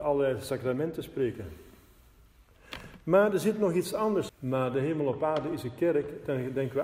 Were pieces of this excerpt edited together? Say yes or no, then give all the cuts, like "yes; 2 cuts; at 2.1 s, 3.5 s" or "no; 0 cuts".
yes; 1 cut; at 4.3 s